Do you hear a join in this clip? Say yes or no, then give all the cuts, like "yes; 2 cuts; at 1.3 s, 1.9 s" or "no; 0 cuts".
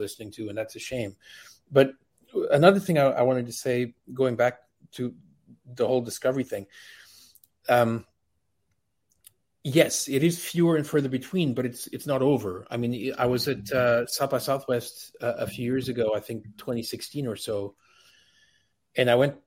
no; 0 cuts